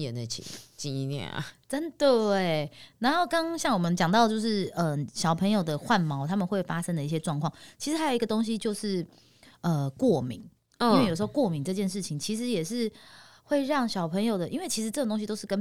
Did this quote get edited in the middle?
no; 0 cuts

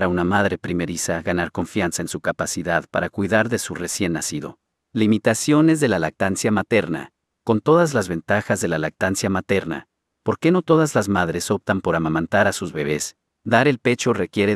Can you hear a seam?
no; 0 cuts

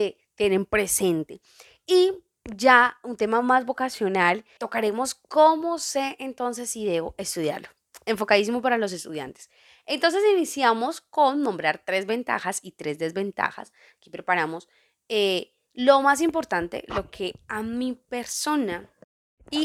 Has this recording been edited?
yes; 1 cut; at 4.6 s

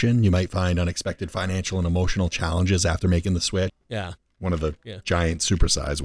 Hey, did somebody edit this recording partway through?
yes; 1 cut; at 3.7 s

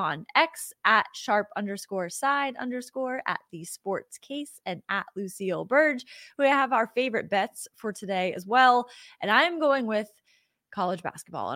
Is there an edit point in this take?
no; 0 cuts

